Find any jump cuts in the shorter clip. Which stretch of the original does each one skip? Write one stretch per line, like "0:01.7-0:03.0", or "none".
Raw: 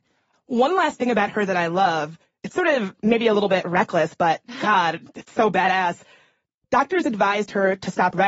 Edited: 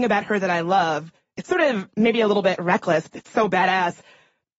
0:04.1-0:05.1